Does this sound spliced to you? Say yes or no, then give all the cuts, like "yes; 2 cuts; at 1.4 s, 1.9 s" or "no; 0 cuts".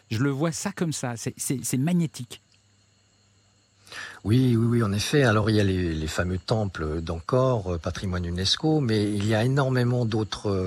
no; 0 cuts